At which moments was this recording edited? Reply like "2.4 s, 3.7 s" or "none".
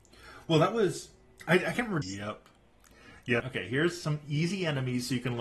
2.0 s, 3.4 s